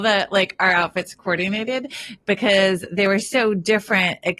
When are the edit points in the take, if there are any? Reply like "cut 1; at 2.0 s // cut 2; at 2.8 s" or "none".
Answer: none